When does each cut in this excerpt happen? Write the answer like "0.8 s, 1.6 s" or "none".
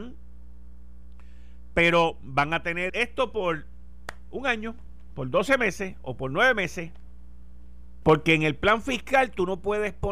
2.9 s, 8.0 s